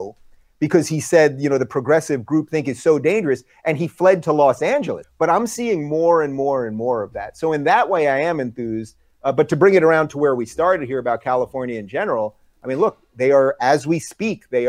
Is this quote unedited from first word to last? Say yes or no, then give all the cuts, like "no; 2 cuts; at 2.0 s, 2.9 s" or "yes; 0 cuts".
no; 1 cut; at 5.0 s